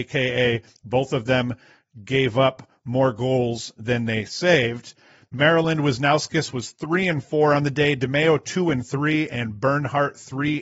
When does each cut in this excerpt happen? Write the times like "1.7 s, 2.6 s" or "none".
none